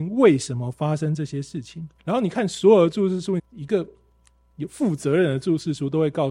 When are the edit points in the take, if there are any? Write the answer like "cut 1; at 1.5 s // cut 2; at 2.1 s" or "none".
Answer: cut 1; at 2.0 s // cut 2; at 3.4 s